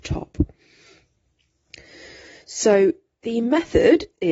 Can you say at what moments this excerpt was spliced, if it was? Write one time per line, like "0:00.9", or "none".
none